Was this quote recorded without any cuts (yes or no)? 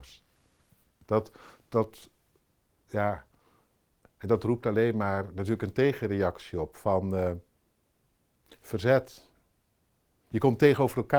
no